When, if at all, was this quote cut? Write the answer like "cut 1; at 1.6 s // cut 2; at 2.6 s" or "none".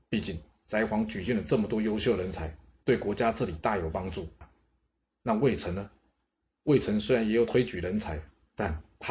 cut 1; at 4.4 s